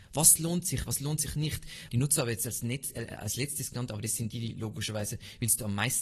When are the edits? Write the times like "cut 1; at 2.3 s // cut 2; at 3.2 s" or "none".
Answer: cut 1; at 1.9 s

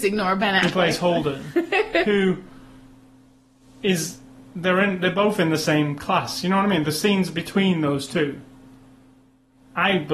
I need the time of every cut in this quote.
none

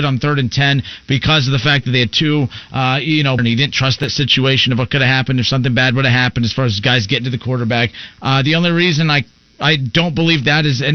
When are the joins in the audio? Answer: cut 1; at 3.4 s // cut 2; at 8.2 s

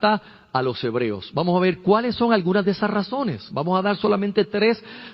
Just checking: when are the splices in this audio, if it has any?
none

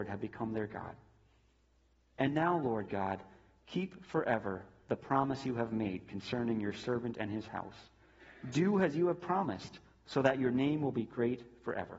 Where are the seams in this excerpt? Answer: none

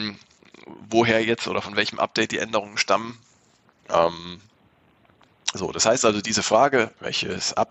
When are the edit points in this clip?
cut 1; at 3.8 s

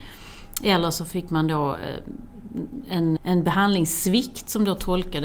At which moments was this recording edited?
cut 1; at 3.2 s

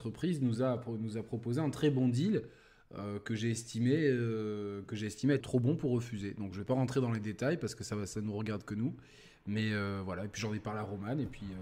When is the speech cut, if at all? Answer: cut 1; at 5.4 s

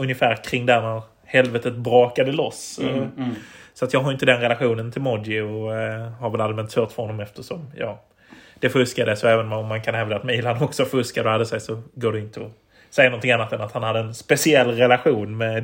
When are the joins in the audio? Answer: none

